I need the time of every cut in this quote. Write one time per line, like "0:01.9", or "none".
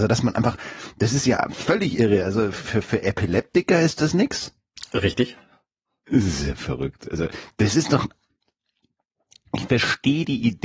none